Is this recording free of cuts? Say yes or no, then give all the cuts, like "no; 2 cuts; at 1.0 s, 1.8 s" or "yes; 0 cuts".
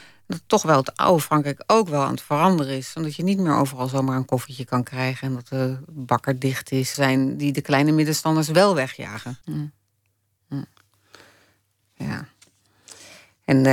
no; 2 cuts; at 6.9 s, 9.4 s